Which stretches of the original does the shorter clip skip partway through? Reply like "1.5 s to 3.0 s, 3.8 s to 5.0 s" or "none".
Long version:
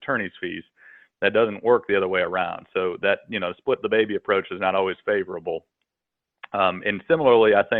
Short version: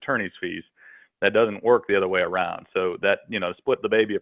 none